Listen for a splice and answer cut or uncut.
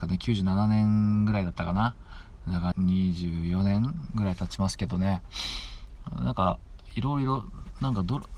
cut